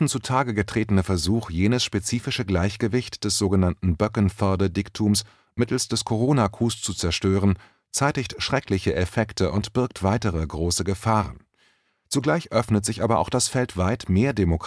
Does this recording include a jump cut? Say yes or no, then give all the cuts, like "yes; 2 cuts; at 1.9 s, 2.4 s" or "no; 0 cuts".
no; 0 cuts